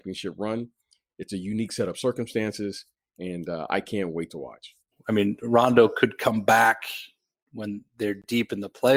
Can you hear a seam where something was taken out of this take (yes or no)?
yes